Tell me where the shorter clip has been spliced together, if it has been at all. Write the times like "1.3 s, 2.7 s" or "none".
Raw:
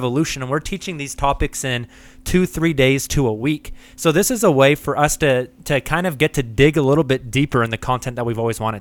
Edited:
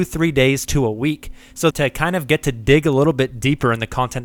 1.7 s